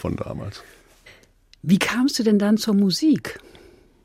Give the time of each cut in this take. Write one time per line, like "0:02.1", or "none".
none